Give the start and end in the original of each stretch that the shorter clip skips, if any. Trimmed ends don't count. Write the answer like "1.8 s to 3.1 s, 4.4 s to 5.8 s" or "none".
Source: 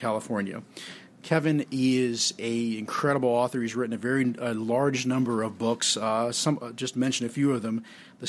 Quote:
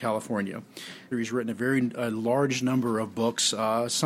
1.1 s to 3.5 s